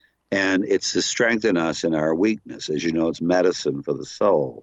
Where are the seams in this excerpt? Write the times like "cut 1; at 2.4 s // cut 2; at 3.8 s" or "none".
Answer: none